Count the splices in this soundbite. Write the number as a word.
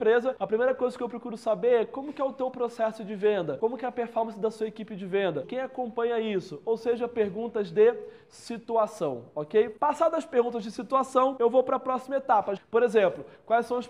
two